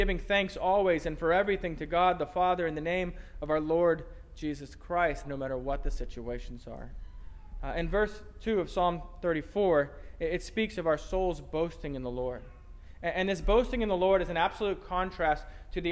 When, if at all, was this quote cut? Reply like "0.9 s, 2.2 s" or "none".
5.2 s